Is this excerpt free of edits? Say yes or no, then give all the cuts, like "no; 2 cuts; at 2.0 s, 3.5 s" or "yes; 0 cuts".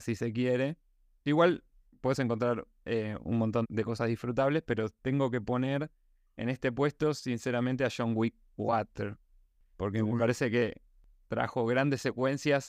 no; 1 cut; at 3.6 s